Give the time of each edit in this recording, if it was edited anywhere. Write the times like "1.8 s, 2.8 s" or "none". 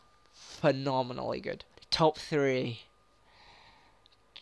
1.7 s